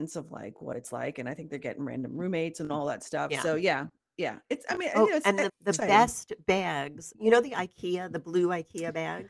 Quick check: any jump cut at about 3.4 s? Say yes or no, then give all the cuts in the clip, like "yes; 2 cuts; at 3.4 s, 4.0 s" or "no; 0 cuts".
no; 2 cuts; at 5.5 s, 7.1 s